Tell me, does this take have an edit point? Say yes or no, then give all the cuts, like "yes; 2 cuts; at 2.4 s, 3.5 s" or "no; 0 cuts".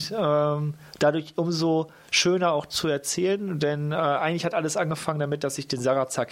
no; 0 cuts